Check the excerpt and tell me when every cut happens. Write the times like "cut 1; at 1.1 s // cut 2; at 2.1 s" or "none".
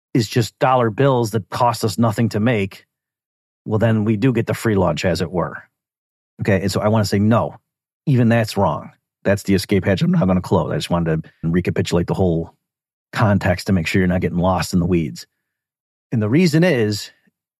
cut 1; at 11.4 s